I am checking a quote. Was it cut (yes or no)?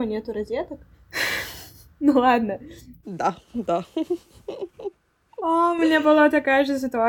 yes